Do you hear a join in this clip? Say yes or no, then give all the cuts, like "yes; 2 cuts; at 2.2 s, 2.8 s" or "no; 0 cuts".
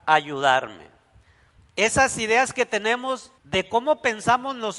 yes; 2 cuts; at 1.6 s, 3.4 s